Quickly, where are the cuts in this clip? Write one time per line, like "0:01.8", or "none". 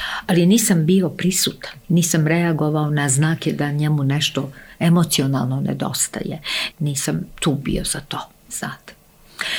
0:01.8
0:06.7